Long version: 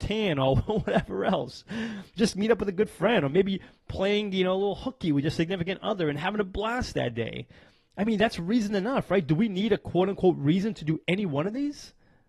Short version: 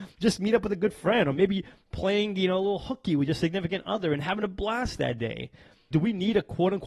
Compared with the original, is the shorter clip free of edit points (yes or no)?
no